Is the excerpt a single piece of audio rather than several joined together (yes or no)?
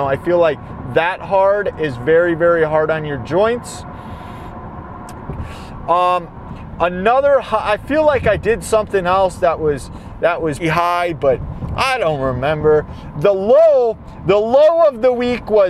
no